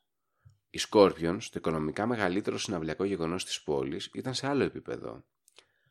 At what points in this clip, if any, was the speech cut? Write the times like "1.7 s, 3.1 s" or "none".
none